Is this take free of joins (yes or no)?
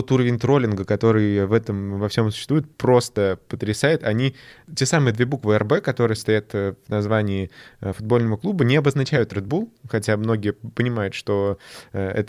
yes